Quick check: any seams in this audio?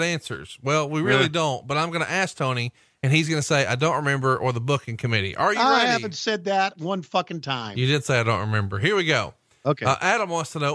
no; 0 cuts

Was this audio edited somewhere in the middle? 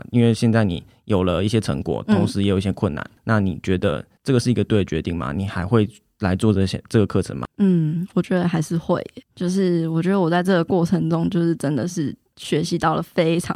yes; 1 cut; at 7.4 s

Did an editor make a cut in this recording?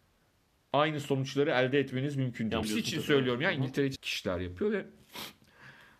yes; 2 cuts; at 2.6 s, 4.0 s

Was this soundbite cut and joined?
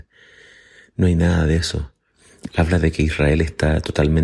yes; 1 cut; at 2.5 s

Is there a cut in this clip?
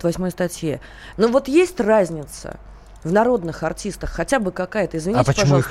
yes; 1 cut; at 1.1 s

